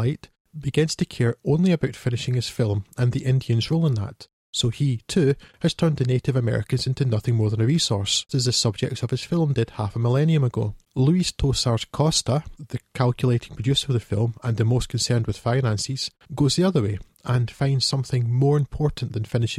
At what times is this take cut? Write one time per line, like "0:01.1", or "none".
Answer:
0:08.3
0:10.8